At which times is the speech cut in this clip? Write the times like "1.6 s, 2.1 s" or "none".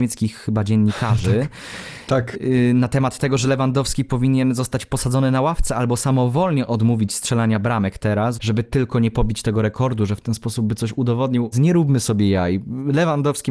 8.3 s, 11.5 s